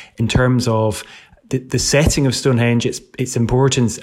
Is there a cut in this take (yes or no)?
no